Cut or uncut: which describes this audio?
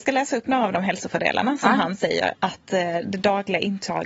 cut